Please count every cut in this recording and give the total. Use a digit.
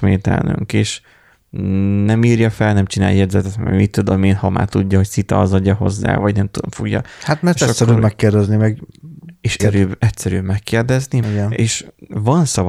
2